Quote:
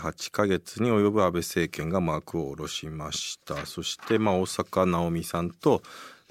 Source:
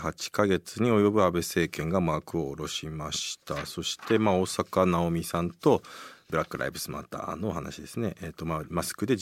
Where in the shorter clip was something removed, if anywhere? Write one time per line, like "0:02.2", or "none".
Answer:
none